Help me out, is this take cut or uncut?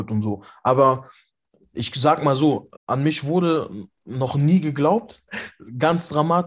cut